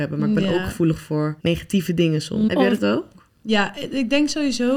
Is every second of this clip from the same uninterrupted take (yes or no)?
no